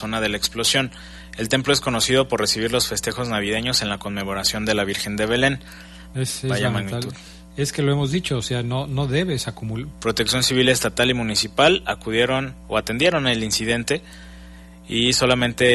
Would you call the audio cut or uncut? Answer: cut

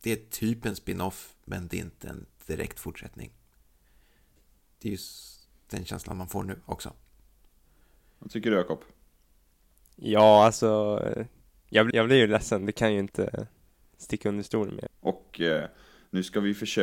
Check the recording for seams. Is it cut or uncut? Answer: cut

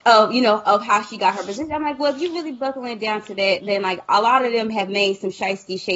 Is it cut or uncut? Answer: uncut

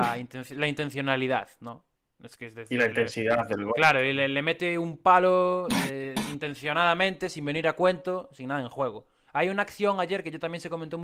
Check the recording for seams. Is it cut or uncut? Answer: uncut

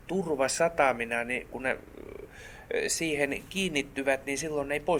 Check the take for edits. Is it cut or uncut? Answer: uncut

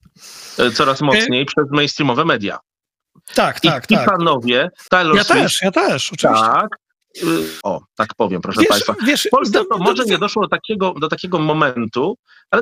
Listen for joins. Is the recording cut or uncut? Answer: cut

